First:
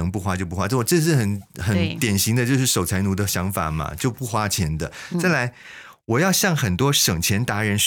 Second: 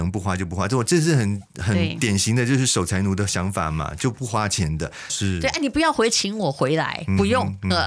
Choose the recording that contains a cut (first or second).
second